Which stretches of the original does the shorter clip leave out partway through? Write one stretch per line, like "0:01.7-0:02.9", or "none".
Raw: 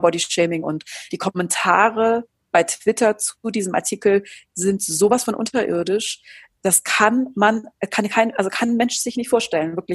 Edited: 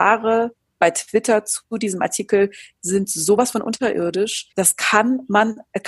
0:06.2-0:06.6